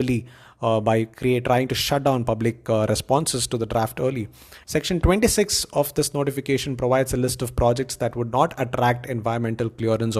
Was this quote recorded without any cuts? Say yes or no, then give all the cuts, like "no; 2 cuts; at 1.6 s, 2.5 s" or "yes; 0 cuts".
no; 1 cut; at 4.6 s